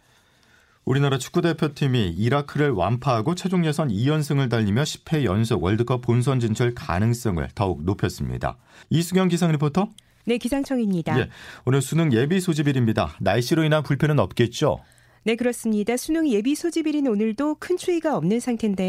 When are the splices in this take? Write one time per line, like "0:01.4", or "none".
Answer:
0:08.8